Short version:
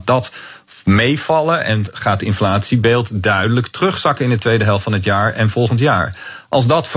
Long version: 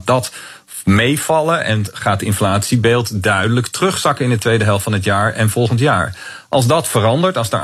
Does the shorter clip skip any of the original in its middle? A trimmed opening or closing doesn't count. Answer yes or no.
no